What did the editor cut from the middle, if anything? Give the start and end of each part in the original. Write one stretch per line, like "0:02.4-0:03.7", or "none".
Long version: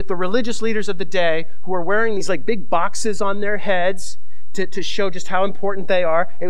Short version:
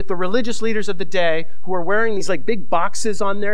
none